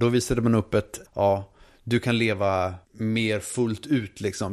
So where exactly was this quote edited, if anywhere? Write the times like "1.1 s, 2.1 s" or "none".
1.0 s, 2.8 s